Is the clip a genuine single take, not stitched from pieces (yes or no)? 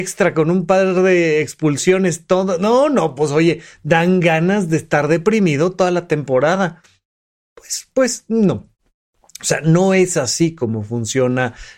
yes